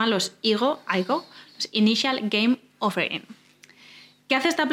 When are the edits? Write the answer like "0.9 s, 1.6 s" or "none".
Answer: none